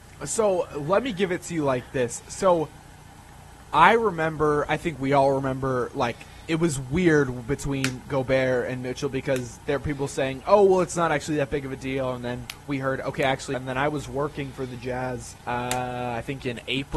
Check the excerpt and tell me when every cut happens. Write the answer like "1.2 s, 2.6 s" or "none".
13.5 s, 15.4 s